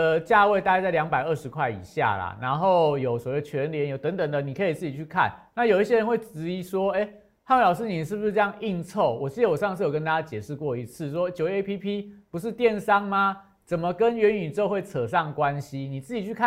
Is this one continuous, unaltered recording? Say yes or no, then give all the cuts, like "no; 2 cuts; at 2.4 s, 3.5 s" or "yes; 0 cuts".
yes; 0 cuts